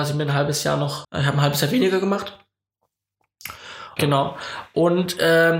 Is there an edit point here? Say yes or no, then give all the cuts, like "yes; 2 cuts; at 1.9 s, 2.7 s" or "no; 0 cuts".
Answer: yes; 2 cuts; at 1.0 s, 4.0 s